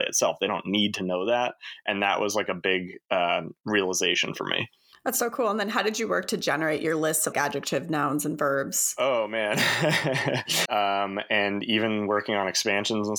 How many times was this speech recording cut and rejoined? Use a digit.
2